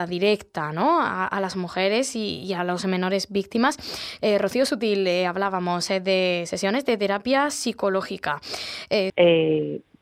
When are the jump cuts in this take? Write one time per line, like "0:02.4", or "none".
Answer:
0:04.2
0:09.1